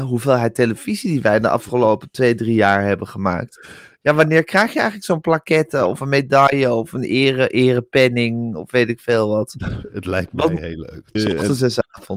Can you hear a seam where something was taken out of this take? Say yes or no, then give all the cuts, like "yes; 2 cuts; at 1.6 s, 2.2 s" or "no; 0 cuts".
yes; 1 cut; at 11.1 s